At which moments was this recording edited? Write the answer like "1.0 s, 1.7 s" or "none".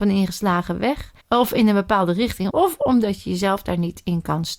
1.2 s, 2.5 s